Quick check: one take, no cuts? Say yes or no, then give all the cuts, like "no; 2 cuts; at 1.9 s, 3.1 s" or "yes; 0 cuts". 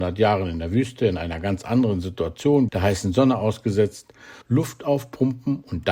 no; 2 cuts; at 2.7 s, 4.4 s